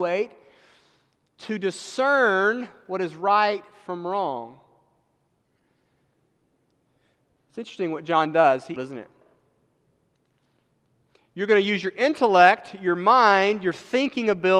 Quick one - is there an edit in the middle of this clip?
yes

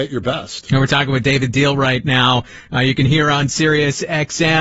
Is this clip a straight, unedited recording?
yes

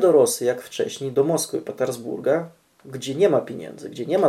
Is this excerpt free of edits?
yes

